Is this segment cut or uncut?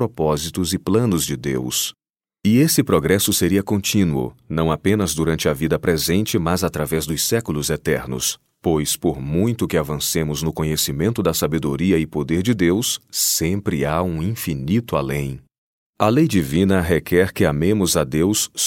uncut